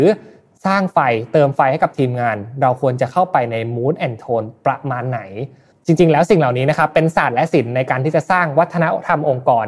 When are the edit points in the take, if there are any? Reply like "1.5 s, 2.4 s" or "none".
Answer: none